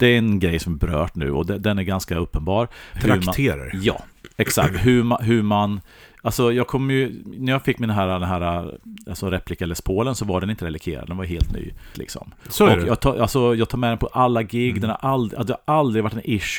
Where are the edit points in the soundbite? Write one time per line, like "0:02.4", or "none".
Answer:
0:02.9
0:11.9